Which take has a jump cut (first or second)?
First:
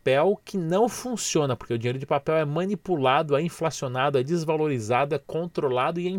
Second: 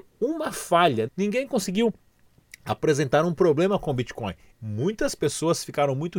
second